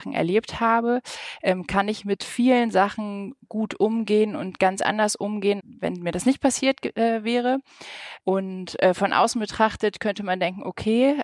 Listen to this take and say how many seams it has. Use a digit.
2